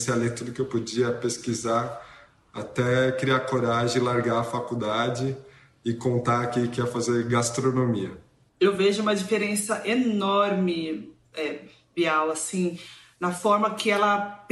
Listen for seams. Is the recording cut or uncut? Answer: cut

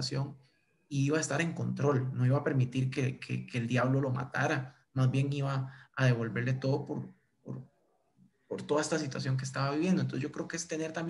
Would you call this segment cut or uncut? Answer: uncut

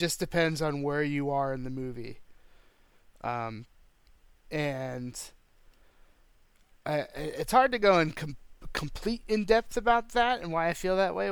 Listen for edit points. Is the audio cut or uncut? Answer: uncut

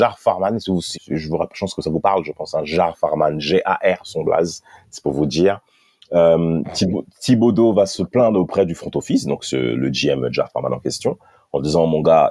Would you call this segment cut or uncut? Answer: cut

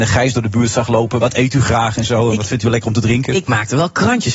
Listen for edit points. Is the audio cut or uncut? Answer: cut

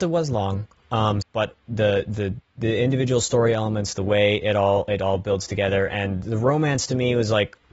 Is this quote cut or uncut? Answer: cut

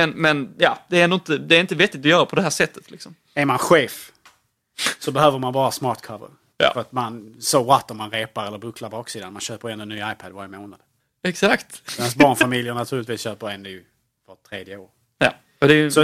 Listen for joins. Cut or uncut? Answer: uncut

